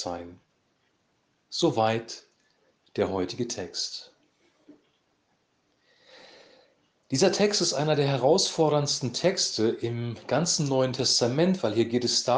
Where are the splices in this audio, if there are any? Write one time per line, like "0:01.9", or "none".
none